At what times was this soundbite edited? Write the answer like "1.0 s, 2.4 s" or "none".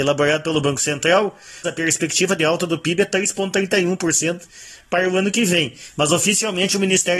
1.6 s